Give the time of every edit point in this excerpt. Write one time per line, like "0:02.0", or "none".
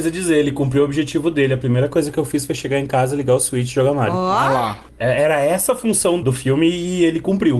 none